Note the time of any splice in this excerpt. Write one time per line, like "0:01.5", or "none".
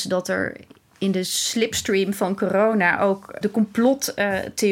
0:03.4